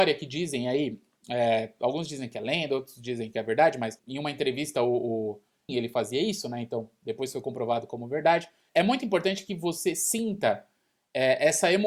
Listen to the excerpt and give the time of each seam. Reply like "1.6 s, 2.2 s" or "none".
5.7 s, 8.7 s